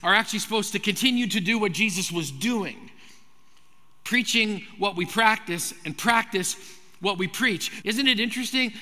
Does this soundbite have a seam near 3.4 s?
no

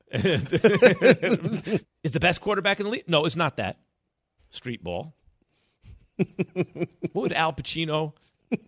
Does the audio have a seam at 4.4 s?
yes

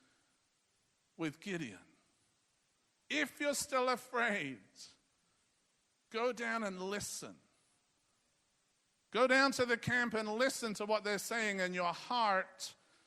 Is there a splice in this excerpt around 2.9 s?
no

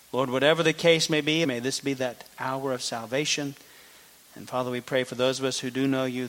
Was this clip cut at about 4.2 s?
no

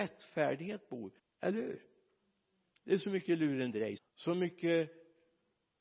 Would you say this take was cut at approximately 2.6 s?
no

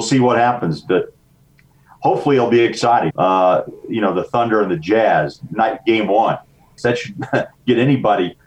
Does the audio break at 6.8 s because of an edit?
yes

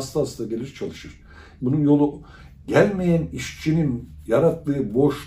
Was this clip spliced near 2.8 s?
no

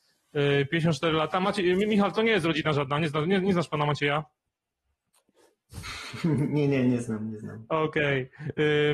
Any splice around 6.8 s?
no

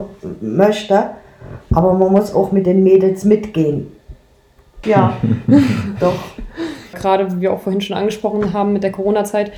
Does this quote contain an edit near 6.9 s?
yes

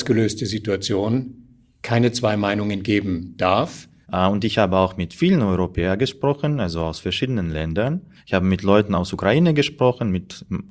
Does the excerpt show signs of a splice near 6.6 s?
no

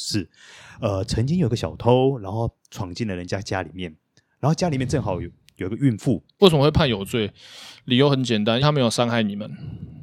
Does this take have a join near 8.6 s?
yes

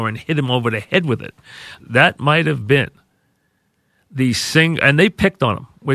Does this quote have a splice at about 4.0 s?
no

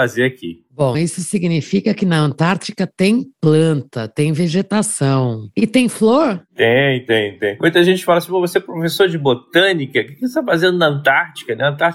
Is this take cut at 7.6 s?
no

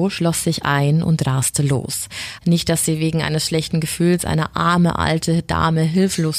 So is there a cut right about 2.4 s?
yes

